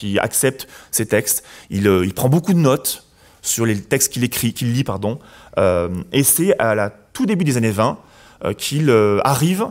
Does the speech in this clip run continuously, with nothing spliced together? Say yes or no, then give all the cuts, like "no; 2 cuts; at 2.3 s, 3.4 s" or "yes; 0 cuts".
yes; 0 cuts